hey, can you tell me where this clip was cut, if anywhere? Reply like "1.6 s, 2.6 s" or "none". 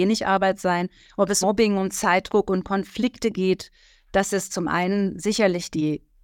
1.4 s